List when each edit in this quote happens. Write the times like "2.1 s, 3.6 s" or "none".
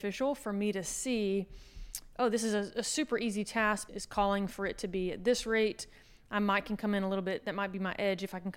3.9 s